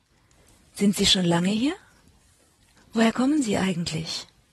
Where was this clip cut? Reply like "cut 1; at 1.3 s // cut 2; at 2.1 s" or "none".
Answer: cut 1; at 2.8 s